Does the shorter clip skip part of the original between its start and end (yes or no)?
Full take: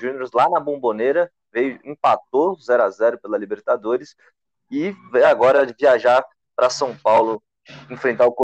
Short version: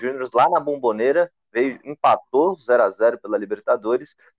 no